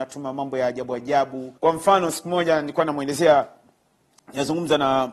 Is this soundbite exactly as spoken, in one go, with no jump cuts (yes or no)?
no